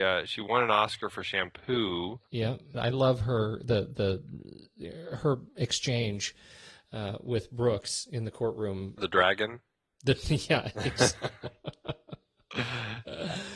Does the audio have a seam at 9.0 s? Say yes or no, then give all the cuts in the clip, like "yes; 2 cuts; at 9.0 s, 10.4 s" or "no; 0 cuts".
yes; 2 cuts; at 2.7 s, 9.0 s